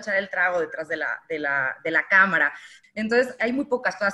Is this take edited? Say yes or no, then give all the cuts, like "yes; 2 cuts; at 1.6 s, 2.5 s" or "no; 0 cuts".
yes; 1 cut; at 2.8 s